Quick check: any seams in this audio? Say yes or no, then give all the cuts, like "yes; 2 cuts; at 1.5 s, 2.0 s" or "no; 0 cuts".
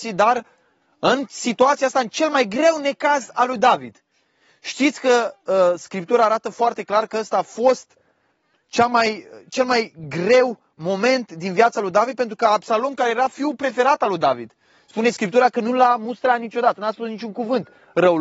no; 0 cuts